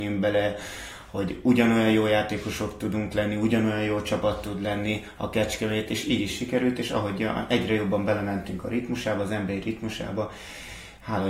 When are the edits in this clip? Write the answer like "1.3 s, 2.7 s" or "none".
none